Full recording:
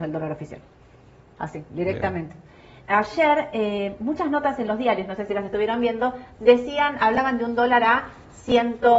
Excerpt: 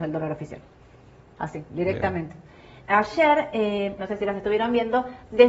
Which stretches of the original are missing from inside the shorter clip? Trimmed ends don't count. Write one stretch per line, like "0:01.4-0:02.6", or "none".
0:04.0-0:05.1